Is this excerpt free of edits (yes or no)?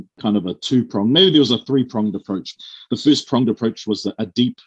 yes